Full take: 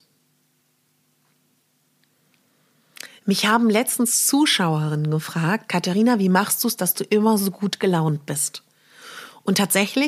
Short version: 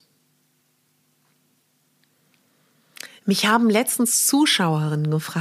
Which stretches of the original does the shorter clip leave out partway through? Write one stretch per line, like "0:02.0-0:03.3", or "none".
none